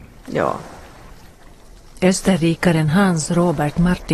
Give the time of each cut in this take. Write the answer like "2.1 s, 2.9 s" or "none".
none